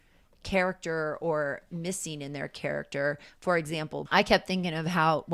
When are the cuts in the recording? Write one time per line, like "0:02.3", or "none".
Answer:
0:04.0